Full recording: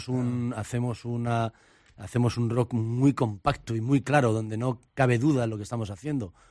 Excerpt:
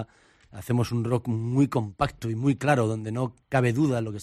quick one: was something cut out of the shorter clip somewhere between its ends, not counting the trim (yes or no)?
no